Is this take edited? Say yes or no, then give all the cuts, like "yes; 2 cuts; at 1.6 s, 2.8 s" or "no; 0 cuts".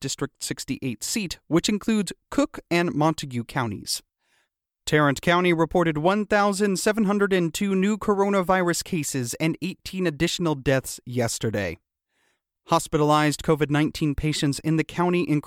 yes; 1 cut; at 4.7 s